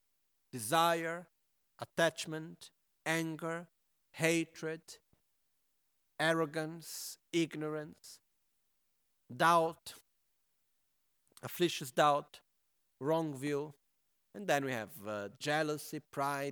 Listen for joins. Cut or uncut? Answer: uncut